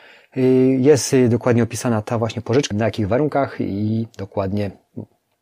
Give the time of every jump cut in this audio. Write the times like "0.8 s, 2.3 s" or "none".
2.7 s